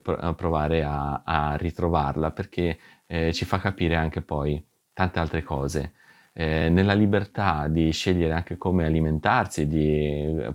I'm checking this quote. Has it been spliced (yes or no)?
no